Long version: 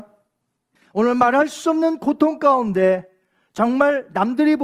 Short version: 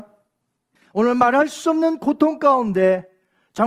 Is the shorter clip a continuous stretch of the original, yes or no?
yes